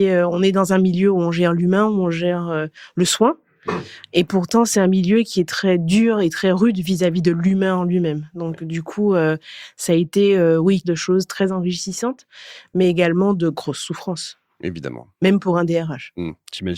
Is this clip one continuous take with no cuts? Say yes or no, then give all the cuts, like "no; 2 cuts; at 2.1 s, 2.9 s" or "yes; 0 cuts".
no; 1 cut; at 10.8 s